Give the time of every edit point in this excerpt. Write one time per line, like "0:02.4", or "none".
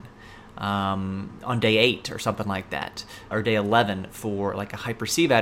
0:03.3